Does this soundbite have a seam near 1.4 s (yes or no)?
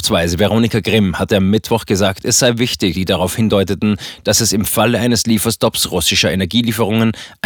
no